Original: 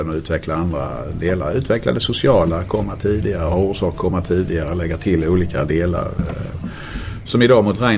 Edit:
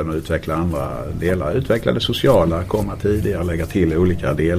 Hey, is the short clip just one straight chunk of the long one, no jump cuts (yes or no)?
no